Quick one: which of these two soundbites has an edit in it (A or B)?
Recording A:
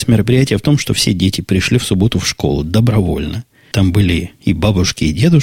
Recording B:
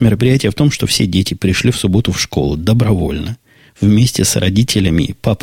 A